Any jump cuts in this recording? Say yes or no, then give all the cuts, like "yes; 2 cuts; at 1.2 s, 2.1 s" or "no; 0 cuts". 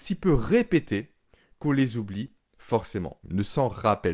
yes; 1 cut; at 3.2 s